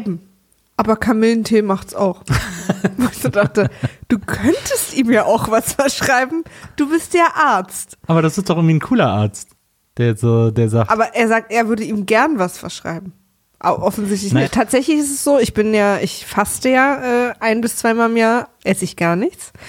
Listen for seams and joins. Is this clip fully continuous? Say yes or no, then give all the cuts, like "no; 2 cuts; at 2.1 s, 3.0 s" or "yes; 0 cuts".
no; 2 cuts; at 14.4 s, 18.6 s